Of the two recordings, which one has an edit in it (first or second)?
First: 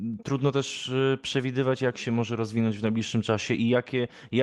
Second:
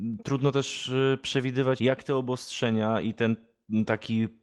second